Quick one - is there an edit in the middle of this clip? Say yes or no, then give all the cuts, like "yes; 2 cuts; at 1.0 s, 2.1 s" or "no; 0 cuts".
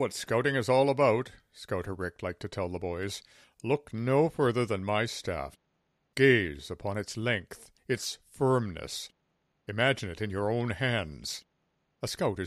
no; 0 cuts